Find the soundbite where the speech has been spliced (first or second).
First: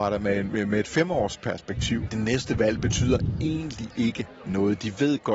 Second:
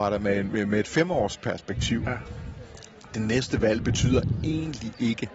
first